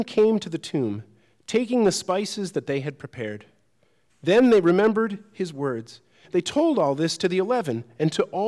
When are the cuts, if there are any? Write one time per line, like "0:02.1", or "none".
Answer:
0:04.1
0:06.2